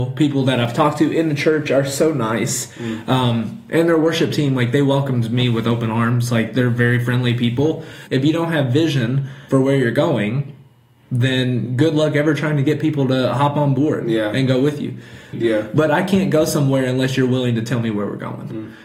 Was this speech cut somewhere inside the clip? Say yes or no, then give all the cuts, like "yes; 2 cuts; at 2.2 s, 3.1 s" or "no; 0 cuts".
yes; 3 cuts; at 8.1 s, 9.5 s, 15.3 s